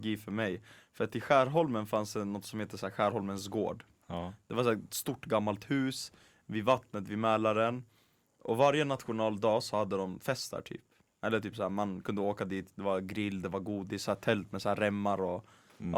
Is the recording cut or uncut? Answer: uncut